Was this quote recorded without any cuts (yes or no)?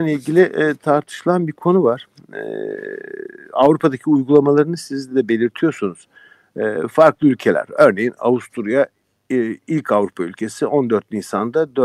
yes